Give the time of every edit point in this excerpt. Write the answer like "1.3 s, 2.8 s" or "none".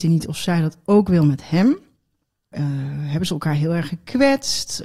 2.5 s